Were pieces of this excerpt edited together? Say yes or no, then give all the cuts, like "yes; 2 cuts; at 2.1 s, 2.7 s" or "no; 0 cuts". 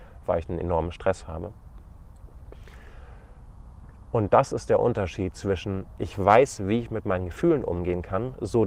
yes; 2 cuts; at 4.0 s, 6.0 s